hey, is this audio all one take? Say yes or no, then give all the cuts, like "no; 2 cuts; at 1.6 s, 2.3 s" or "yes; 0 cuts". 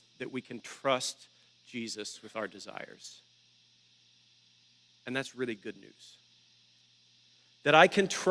yes; 0 cuts